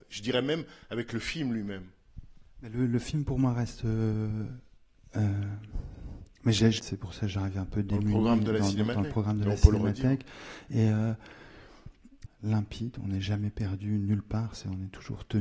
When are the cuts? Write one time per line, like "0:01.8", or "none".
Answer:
0:06.8
0:12.3